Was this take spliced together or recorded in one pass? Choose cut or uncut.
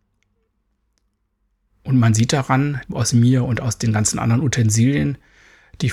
cut